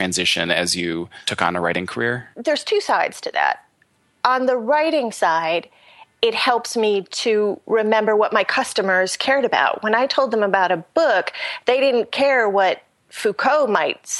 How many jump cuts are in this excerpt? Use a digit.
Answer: 1